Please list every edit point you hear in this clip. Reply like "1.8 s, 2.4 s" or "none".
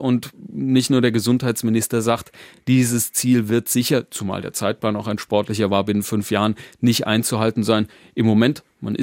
none